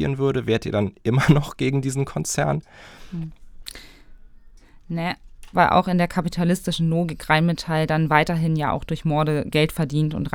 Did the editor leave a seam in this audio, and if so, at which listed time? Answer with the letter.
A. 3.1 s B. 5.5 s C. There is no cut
B